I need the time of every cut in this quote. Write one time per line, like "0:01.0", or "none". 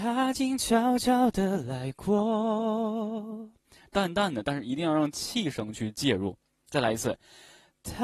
none